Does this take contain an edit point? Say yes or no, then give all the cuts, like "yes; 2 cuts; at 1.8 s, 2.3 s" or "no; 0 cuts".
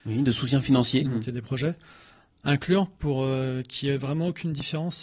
yes; 1 cut; at 1.0 s